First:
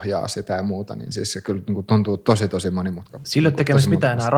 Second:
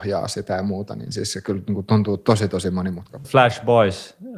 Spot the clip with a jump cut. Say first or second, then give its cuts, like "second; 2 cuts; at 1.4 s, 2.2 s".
second; 1 cut; at 3.2 s